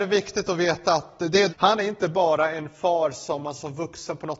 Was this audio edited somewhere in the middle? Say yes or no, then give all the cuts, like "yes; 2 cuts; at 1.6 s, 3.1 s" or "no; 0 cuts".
yes; 1 cut; at 1.5 s